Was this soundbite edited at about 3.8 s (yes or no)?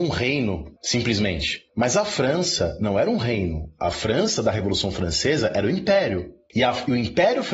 no